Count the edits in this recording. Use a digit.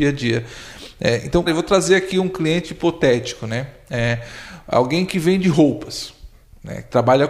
1